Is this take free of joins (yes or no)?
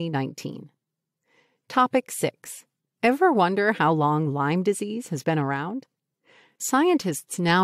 yes